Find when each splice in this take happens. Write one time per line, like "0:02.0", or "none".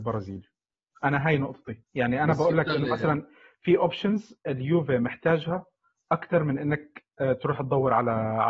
0:01.9